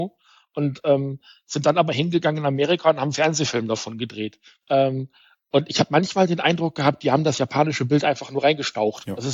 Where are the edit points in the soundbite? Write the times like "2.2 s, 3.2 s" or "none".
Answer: 4.6 s